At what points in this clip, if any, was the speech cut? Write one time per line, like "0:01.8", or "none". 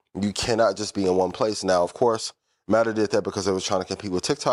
none